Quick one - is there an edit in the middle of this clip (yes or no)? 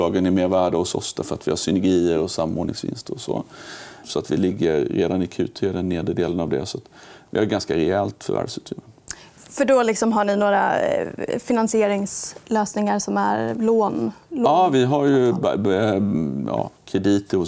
yes